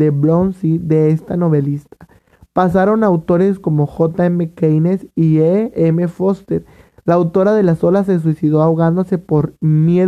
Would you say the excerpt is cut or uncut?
uncut